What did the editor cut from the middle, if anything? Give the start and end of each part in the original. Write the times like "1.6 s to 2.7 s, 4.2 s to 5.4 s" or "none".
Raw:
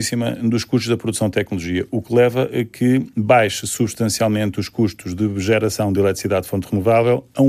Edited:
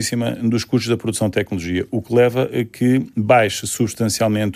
none